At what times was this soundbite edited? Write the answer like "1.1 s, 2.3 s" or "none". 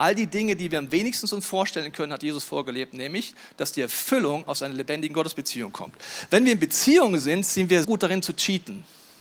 7.8 s